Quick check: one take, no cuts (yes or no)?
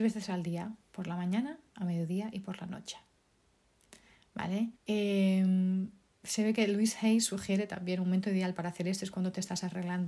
no